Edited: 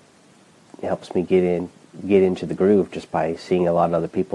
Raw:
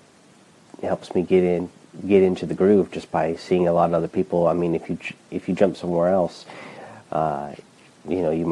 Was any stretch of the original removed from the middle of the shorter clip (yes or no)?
no